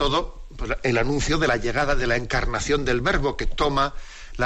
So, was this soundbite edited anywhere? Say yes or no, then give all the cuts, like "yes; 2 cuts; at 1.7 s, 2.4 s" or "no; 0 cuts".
no; 0 cuts